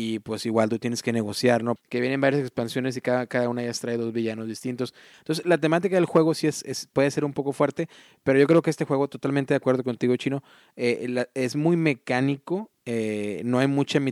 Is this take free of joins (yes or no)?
no